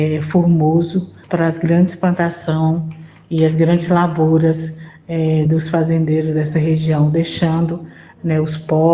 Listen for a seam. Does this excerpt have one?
no; 0 cuts

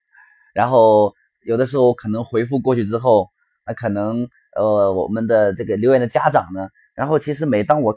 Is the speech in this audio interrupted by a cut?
yes; 1 cut; at 6.9 s

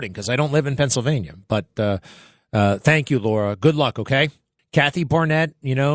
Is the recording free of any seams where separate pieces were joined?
no; 1 cut; at 4.6 s

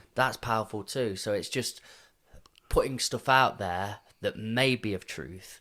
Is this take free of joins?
yes; 0 cuts

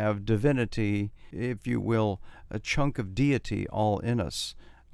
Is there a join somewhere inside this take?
yes; 1 cut; at 1.3 s

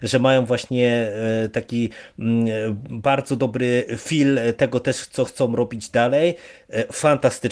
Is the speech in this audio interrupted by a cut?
no; 0 cuts

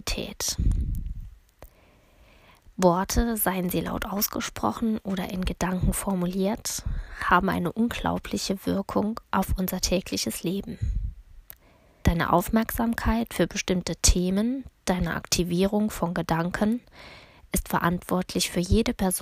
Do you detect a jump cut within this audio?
yes; 1 cut; at 12.0 s

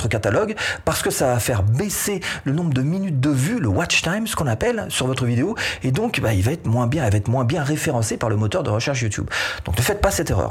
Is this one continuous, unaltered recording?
yes; 0 cuts

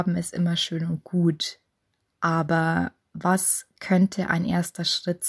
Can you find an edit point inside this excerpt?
no; 0 cuts

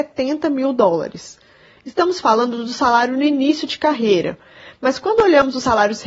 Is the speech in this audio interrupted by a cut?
no; 0 cuts

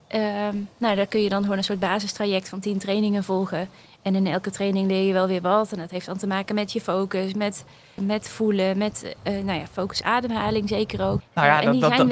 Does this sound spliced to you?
yes; 3 cuts; at 8.0 s, 10.0 s, 11.2 s

